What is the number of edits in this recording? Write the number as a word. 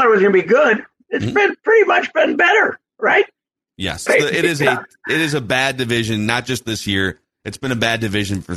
one